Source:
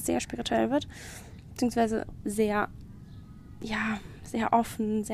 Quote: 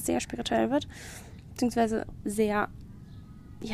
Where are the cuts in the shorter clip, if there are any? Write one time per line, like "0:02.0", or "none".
none